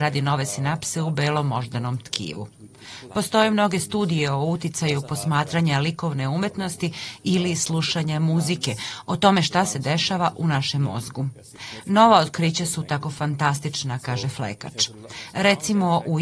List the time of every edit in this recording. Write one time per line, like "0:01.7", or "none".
0:03.1